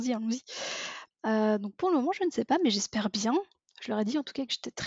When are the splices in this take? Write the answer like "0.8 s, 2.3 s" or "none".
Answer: 1.1 s